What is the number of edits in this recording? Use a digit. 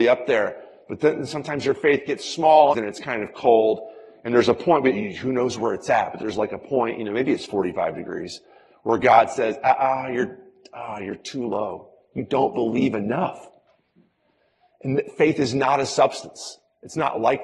1